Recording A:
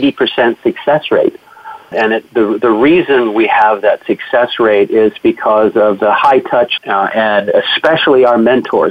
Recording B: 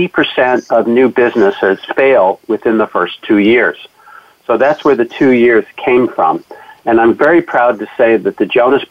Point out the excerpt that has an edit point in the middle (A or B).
A